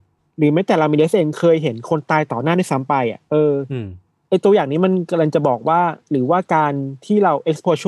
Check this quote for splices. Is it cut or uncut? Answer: cut